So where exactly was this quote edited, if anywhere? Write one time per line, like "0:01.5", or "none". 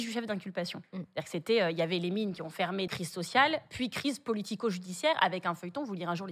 0:02.9